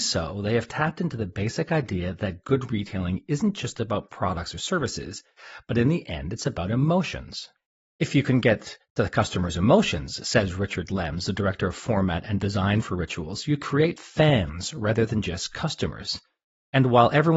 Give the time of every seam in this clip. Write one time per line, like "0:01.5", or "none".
none